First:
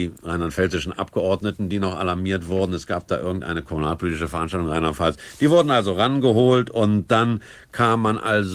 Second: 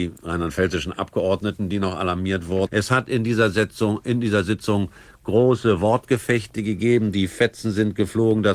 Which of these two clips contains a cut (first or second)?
second